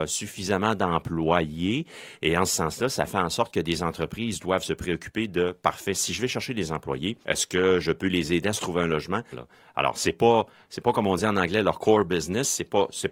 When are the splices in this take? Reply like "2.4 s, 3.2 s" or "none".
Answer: 7.2 s, 9.3 s